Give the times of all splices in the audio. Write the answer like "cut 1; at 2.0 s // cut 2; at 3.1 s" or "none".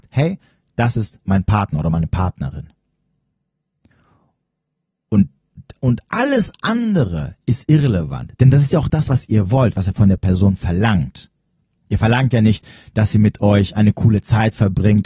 none